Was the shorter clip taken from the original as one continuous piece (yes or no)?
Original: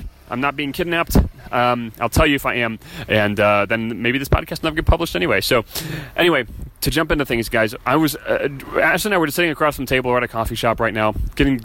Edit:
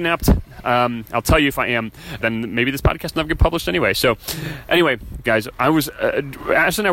no